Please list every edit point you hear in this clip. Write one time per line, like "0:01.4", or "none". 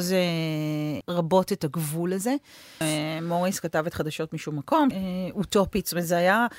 0:01.0
0:02.8
0:04.9